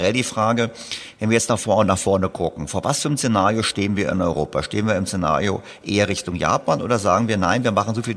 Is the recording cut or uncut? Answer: uncut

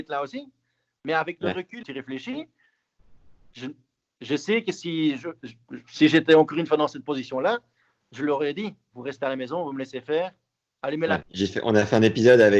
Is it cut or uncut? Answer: cut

